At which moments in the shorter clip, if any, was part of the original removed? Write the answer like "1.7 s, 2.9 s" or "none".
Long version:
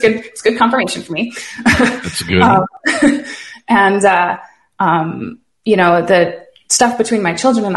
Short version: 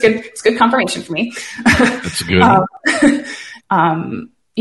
3.6 s